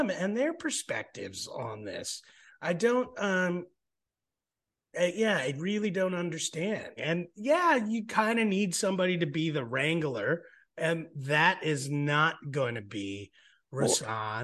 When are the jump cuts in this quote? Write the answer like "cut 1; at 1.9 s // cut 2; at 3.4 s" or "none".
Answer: cut 1; at 7.0 s